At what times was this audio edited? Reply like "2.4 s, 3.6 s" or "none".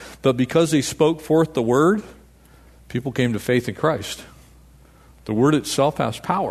none